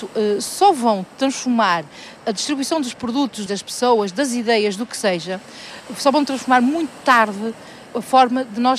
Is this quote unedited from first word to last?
no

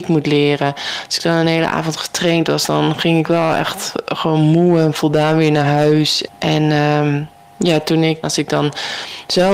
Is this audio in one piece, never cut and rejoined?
no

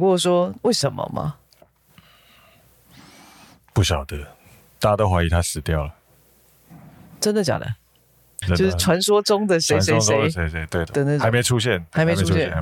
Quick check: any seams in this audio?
yes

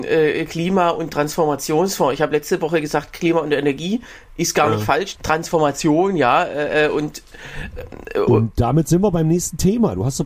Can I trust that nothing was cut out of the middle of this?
no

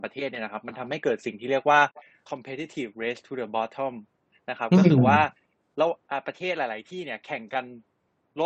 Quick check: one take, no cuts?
no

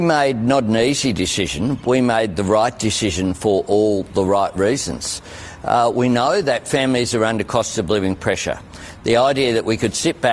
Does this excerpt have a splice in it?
no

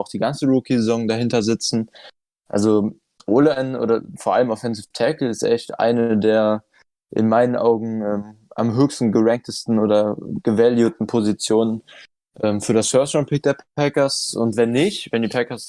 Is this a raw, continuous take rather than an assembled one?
yes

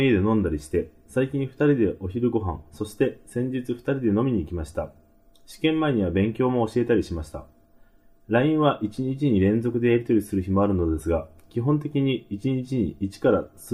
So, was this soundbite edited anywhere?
no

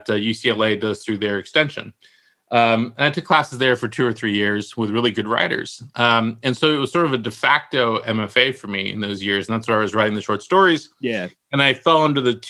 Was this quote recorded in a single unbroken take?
yes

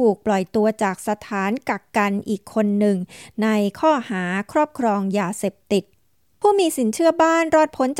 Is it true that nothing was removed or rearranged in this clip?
yes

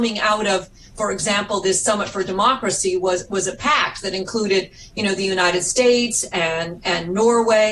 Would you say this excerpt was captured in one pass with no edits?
yes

